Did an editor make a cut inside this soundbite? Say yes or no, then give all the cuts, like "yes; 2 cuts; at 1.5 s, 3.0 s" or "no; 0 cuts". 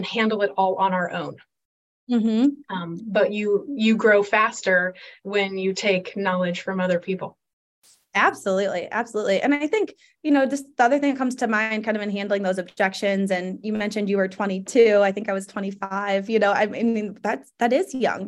no; 0 cuts